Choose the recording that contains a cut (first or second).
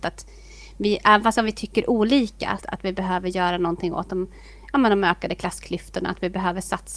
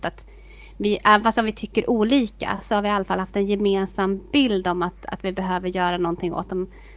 first